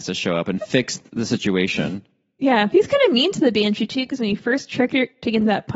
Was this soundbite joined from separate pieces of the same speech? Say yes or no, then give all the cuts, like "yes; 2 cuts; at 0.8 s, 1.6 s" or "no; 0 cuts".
no; 0 cuts